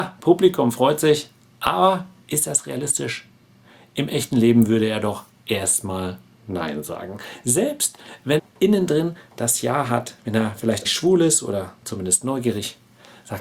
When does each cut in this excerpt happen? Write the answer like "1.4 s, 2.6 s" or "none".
8.4 s, 10.8 s